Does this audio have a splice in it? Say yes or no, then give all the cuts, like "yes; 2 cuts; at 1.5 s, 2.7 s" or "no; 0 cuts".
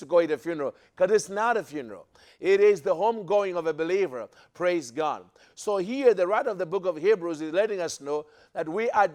no; 0 cuts